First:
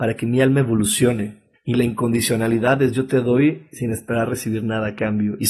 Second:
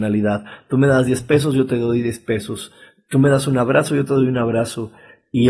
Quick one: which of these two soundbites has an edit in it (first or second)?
first